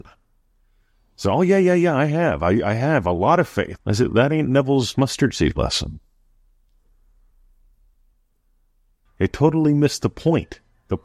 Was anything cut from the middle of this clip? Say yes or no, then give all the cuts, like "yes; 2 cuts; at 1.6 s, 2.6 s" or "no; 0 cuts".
yes; 2 cuts; at 3.8 s, 9.1 s